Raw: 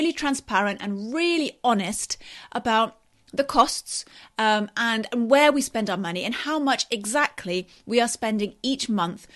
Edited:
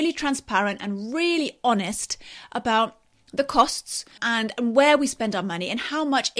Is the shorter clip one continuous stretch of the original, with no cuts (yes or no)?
no